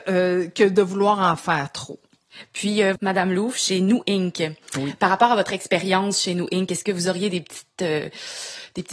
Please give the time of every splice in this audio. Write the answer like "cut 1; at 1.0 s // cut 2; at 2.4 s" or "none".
cut 1; at 3.0 s